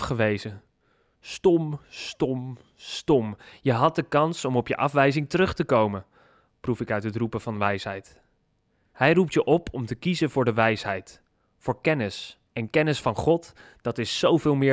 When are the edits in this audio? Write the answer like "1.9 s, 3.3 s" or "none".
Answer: 8.9 s, 12.5 s